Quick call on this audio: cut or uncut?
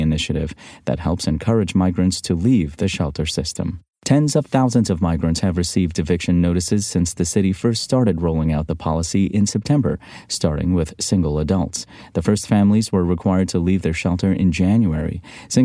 cut